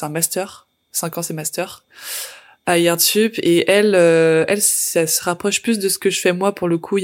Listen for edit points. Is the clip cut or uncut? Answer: uncut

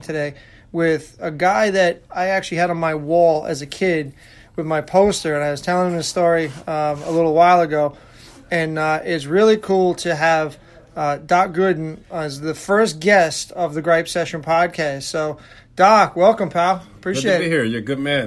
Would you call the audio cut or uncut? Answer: uncut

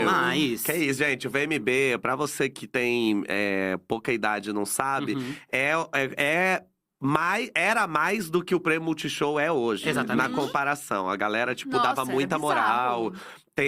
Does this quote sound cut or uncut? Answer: uncut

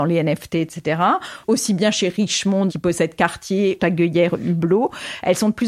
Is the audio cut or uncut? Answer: cut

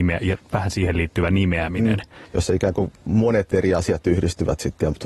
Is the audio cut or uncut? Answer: cut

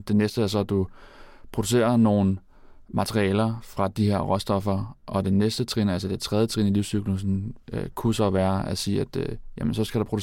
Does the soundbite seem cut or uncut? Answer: uncut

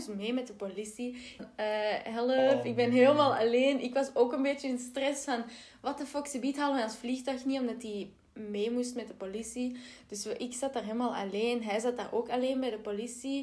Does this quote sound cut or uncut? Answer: cut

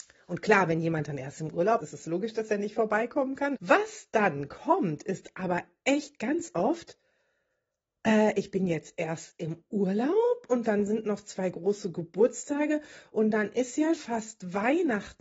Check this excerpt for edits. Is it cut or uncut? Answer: cut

